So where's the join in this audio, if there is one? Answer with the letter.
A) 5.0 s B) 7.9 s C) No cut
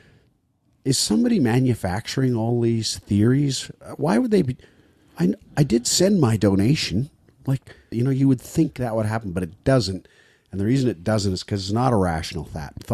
B